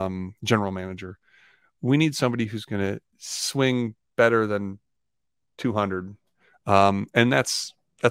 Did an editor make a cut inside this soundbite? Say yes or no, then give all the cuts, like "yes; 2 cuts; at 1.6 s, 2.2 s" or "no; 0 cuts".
no; 0 cuts